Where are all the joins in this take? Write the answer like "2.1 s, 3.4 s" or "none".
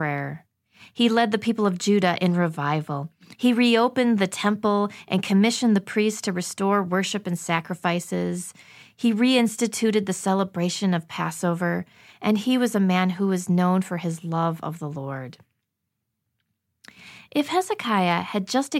none